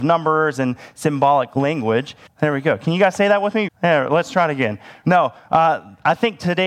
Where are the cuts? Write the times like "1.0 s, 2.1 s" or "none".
2.3 s, 3.7 s, 5.0 s